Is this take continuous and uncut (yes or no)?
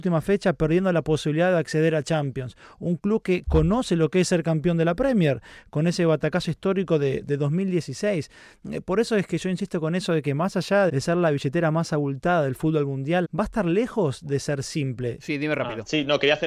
no